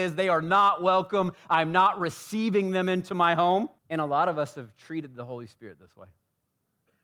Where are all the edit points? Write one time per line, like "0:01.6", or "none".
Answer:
0:03.8